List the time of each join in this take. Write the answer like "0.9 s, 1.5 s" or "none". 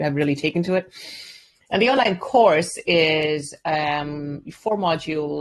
none